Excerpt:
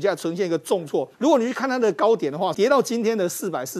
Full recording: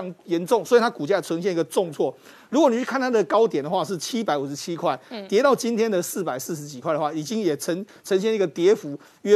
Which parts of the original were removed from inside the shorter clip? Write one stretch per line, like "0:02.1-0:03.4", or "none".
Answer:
0:02.2-0:02.5
0:03.9-0:05.3

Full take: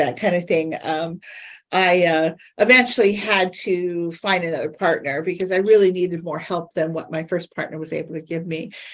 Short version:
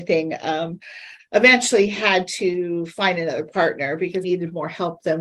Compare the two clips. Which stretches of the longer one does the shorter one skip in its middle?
0:01.6-0:02.4
0:05.5-0:05.9

